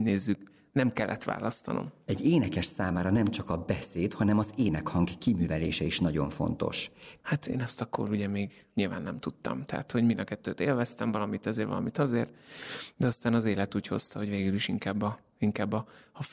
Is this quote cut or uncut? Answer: cut